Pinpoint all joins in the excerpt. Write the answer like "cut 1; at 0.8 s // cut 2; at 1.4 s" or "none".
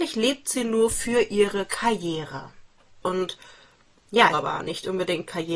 cut 1; at 3.0 s // cut 2; at 4.3 s